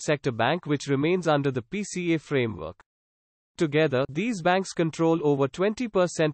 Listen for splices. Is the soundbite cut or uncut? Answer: uncut